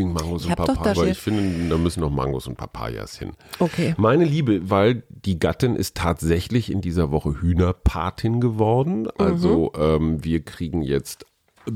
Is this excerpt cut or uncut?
cut